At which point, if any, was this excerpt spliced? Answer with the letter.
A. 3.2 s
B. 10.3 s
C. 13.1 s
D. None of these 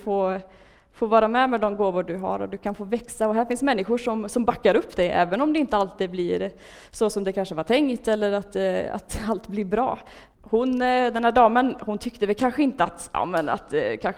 B